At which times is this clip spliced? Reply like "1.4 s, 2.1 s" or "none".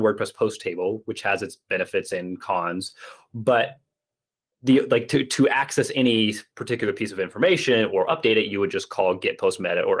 none